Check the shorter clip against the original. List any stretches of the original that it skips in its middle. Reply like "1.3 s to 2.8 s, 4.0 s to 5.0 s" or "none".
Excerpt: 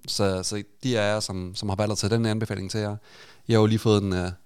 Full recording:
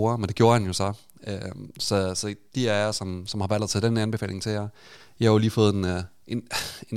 none